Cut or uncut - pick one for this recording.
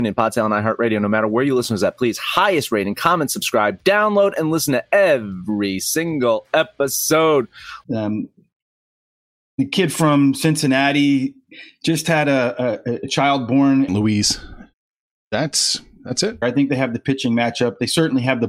cut